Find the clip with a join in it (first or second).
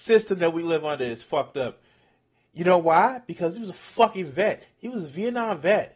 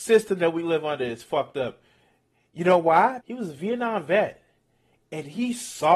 second